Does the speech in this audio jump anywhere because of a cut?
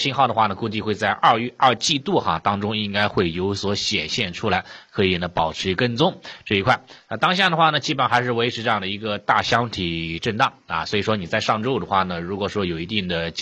no; 0 cuts

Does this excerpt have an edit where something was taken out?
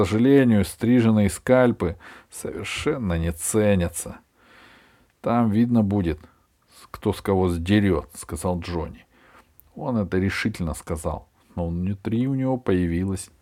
no; 0 cuts

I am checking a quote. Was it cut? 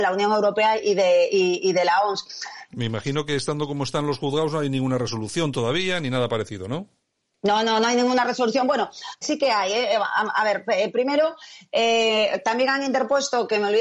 yes; 2 cuts; at 2.7 s, 9.2 s

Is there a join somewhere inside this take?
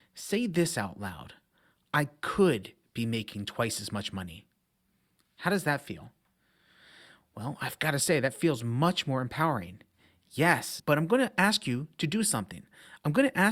yes; 1 cut; at 10.8 s

